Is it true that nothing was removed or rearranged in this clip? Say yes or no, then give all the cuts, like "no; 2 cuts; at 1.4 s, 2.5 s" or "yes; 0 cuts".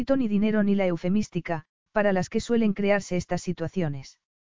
no; 1 cut; at 1.9 s